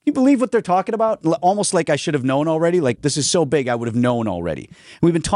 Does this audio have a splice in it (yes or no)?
yes